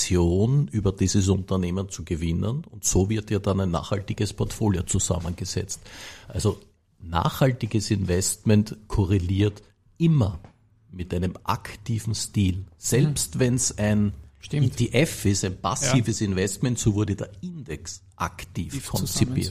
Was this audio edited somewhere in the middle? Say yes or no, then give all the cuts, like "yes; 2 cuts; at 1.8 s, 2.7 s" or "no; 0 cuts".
no; 0 cuts